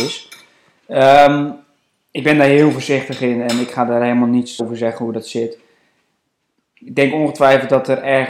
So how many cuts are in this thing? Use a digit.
1